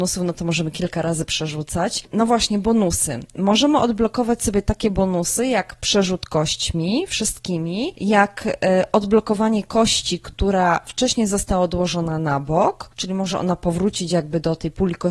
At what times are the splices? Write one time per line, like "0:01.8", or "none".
none